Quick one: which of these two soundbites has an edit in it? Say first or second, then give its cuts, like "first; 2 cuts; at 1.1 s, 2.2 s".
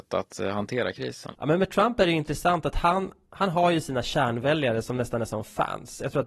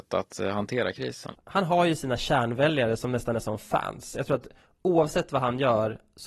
second; 1 cut; at 1.4 s